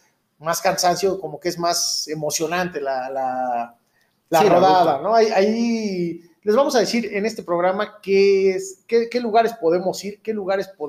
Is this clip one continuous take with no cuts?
yes; 0 cuts

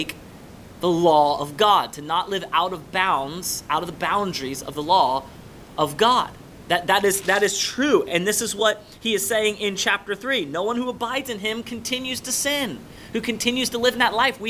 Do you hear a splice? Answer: no; 0 cuts

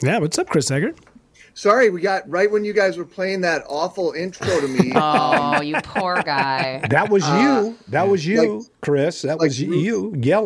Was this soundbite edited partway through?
no; 0 cuts

